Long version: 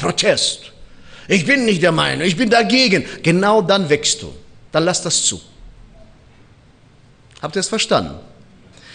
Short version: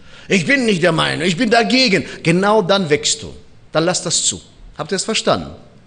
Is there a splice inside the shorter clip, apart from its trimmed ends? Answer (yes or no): yes